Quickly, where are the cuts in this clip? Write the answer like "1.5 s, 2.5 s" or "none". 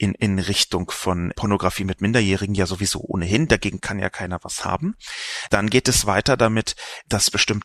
1.3 s